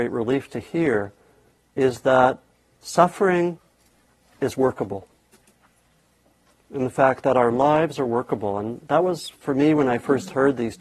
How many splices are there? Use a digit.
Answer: 0